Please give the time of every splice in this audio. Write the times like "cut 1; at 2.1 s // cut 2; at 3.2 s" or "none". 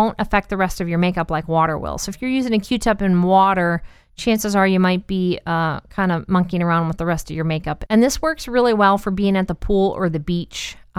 cut 1; at 7.9 s